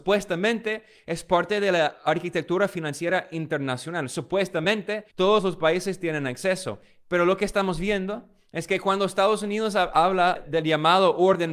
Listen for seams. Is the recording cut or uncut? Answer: cut